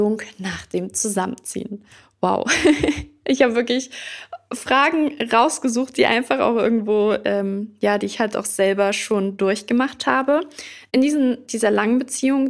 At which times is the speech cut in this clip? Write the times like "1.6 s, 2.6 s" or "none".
none